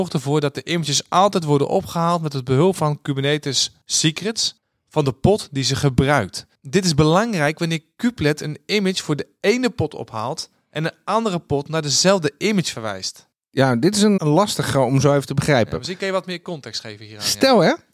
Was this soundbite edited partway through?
yes; 1 cut; at 14.2 s

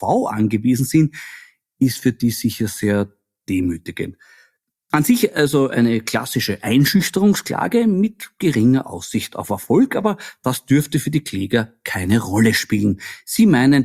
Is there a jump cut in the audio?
no; 0 cuts

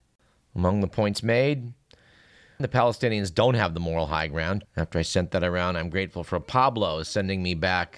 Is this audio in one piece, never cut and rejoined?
no; 2 cuts; at 2.6 s, 4.6 s

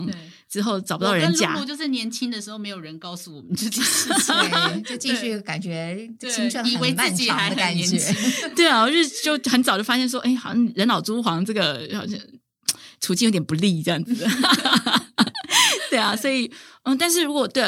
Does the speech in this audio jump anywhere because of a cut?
no; 0 cuts

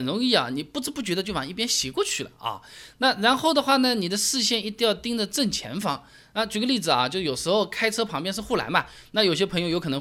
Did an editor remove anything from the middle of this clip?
no; 0 cuts

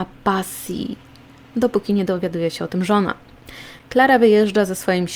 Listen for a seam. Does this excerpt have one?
yes; 1 cut; at 3.8 s

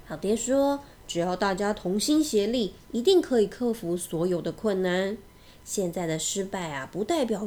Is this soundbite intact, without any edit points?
yes; 0 cuts

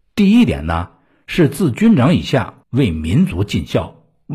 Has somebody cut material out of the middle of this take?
yes; 1 cut; at 2.6 s

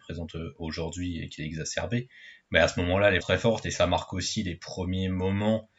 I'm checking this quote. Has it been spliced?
yes; 1 cut; at 3.2 s

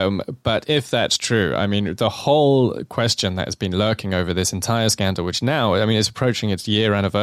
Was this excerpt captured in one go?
yes; 0 cuts

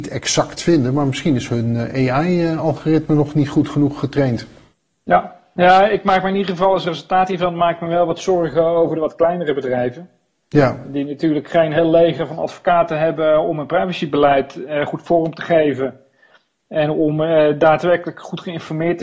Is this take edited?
no; 0 cuts

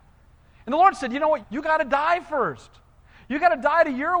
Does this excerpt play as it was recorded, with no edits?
no; 1 cut; at 1.4 s

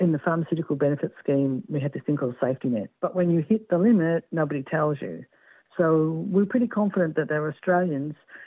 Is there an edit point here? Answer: yes; 1 cut; at 3.0 s

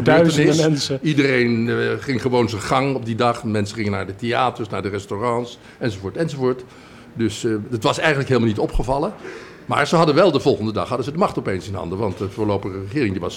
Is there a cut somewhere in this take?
no; 0 cuts

